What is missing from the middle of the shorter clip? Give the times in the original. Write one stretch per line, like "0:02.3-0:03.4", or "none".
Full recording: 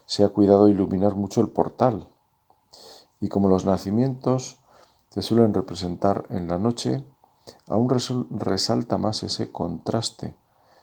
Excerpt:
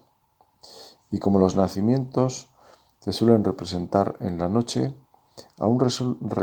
none